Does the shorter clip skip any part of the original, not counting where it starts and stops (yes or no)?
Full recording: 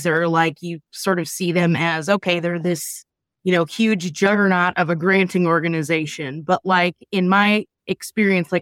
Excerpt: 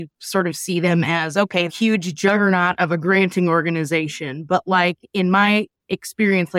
yes